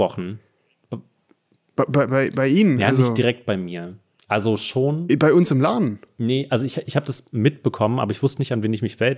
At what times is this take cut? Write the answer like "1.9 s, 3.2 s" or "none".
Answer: none